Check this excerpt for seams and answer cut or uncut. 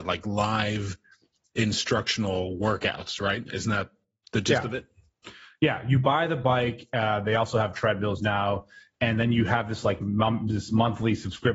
uncut